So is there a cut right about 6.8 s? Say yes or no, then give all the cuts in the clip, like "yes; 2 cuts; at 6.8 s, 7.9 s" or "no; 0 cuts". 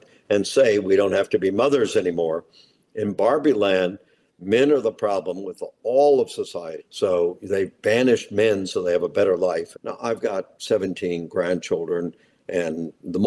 yes; 2 cuts; at 6.8 s, 9.7 s